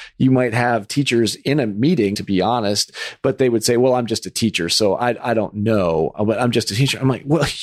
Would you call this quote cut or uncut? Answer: cut